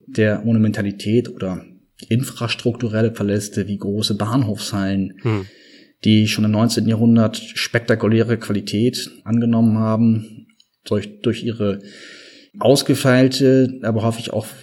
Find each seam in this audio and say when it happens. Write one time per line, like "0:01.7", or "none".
0:09.2

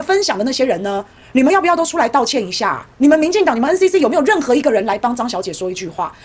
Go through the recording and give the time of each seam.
0:02.9

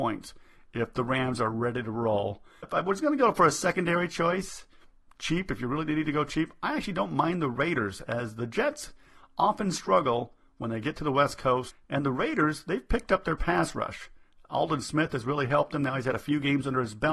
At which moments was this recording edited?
none

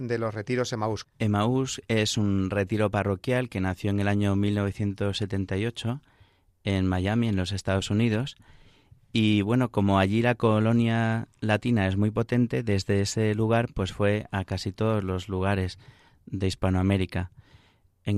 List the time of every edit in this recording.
0:01.0

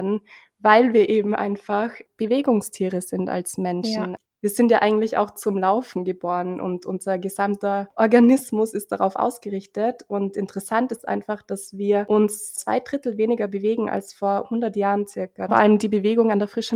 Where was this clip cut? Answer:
0:15.5

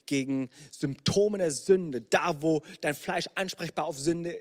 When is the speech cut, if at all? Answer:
none

